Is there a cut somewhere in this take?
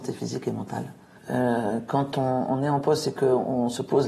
yes; 1 cut; at 1.2 s

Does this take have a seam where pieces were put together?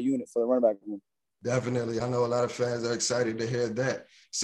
no; 0 cuts

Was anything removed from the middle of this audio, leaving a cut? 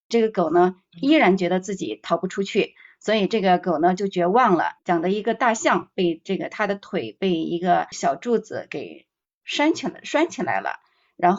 yes; 1 cut; at 4.8 s

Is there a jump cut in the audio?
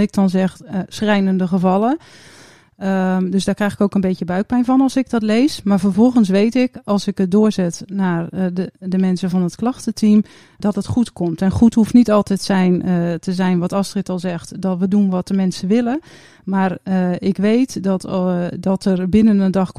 no; 0 cuts

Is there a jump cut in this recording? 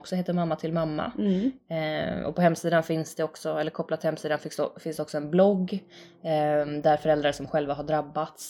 no; 0 cuts

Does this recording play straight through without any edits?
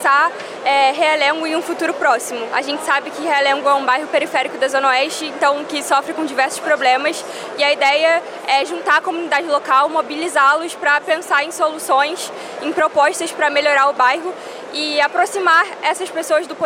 yes; 0 cuts

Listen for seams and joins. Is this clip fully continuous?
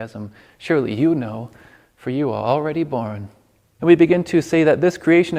no; 1 cut; at 3.8 s

